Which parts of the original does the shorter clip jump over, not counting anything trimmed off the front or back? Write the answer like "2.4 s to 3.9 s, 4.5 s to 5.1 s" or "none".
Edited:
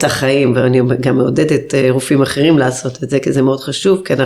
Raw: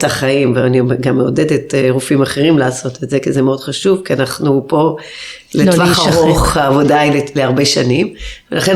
none